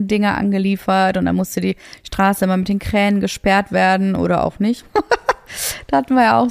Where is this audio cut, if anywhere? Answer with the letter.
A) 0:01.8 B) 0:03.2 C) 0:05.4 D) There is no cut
D